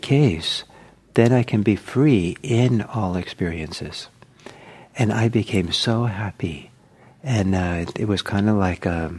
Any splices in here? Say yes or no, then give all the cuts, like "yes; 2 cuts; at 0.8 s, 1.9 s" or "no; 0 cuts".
no; 0 cuts